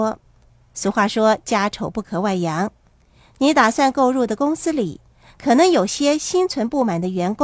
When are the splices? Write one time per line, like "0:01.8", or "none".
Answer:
none